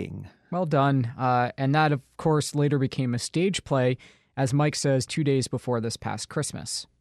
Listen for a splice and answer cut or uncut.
cut